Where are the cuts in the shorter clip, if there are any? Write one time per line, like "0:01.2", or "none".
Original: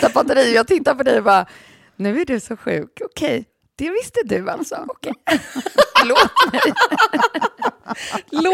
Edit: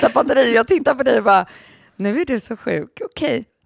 none